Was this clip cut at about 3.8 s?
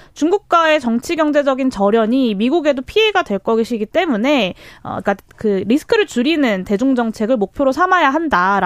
no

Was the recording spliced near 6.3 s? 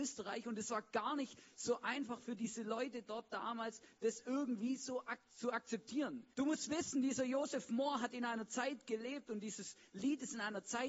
yes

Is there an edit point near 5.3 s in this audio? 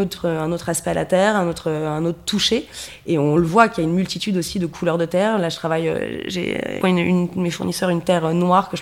no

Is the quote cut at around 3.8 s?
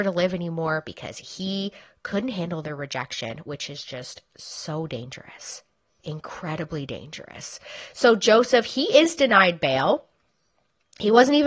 no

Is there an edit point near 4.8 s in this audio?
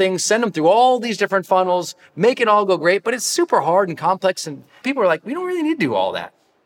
yes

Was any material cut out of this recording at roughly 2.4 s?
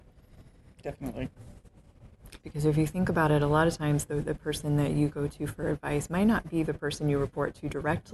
yes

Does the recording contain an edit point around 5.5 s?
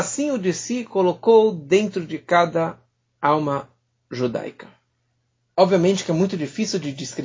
no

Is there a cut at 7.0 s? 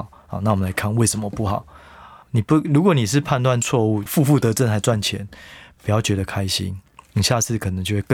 no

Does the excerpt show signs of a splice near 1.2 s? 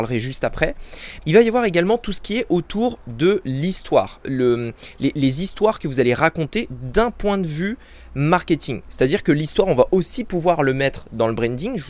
yes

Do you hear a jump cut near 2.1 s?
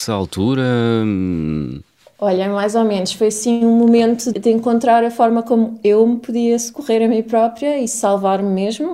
no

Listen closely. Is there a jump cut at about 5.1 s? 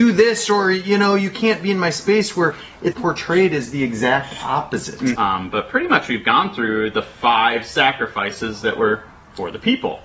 yes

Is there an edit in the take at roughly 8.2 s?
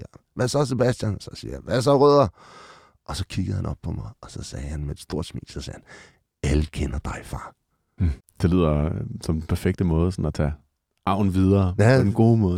yes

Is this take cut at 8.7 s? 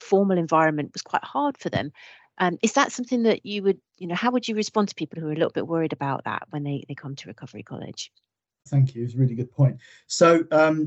yes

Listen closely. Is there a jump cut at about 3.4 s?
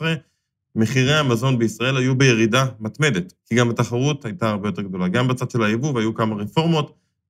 yes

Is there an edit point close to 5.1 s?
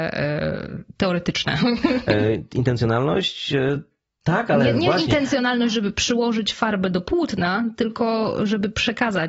no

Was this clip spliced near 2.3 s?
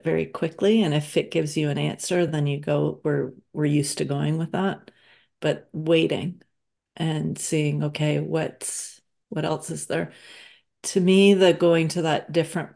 no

